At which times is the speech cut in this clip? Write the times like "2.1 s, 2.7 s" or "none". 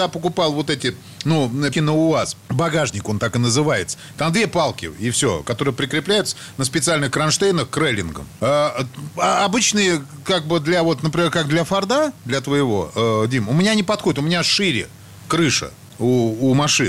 1.7 s